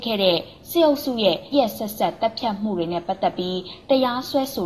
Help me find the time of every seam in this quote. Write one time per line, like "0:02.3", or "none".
0:01.5

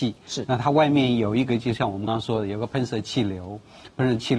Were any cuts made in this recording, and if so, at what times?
0:02.1

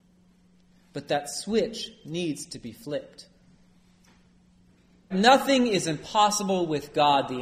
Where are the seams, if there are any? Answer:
0:05.1

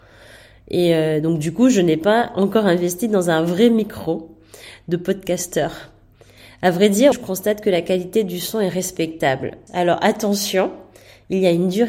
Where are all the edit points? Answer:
0:07.1
0:09.7

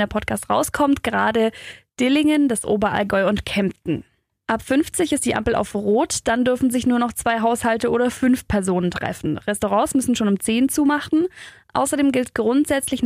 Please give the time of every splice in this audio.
none

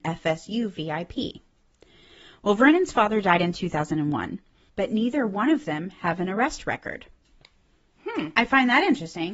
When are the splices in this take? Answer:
0:04.7

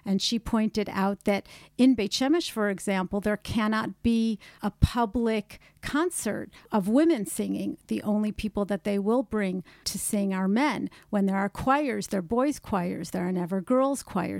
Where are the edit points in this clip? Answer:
none

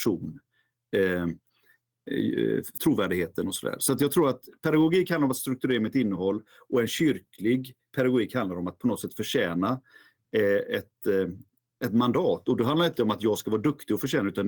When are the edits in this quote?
0:02.8

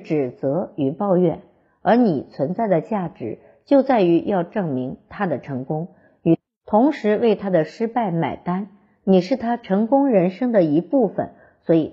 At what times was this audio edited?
none

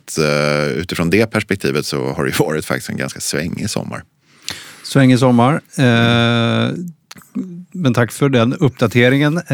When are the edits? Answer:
none

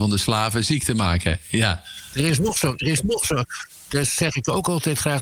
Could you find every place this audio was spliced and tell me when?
none

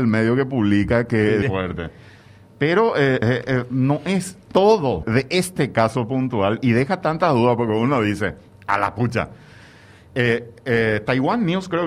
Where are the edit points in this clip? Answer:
0:01.4
0:03.2
0:05.0

